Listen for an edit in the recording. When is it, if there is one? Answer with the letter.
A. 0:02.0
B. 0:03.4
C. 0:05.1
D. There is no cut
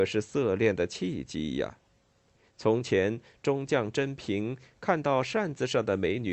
D